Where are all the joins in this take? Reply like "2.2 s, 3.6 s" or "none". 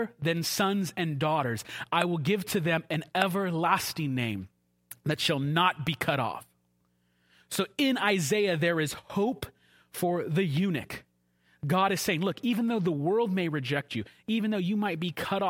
none